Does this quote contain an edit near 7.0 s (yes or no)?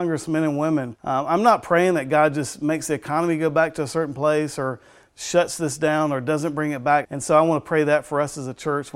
yes